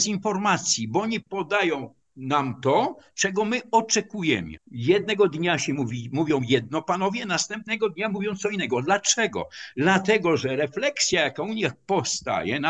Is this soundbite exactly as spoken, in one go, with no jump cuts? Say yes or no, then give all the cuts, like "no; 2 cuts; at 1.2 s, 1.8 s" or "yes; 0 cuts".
no; 1 cut; at 4.6 s